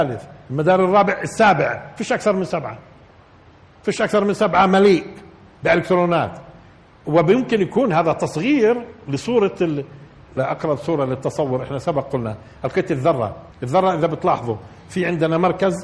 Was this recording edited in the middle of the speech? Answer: yes; 2 cuts; at 10.4 s, 13.5 s

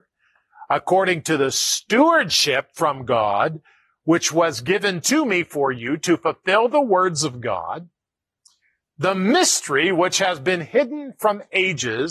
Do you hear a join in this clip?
no; 0 cuts

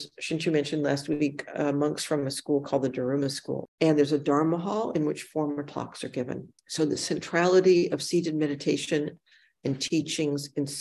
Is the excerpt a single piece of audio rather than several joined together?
no; 2 cuts; at 3.7 s, 6.6 s

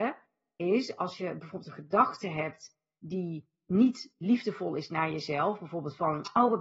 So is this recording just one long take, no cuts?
yes; 0 cuts

